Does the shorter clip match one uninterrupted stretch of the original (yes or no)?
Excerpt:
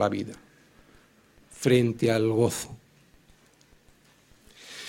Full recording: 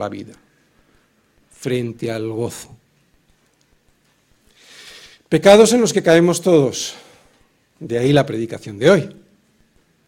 yes